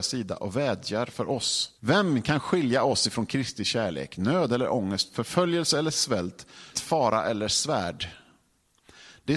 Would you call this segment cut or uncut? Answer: cut